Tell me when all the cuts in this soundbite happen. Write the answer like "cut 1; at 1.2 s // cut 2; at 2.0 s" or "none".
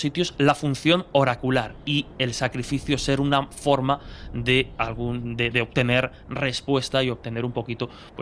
none